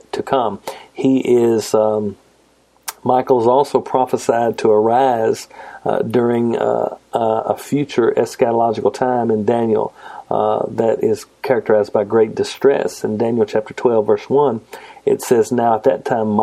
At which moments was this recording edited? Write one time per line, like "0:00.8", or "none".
none